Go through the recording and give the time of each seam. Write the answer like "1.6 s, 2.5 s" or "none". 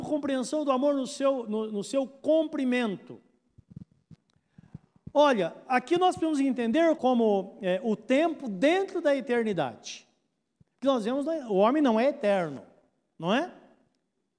7.0 s